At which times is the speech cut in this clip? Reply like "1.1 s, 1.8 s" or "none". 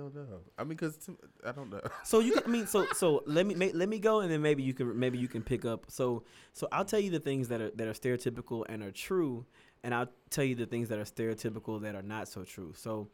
none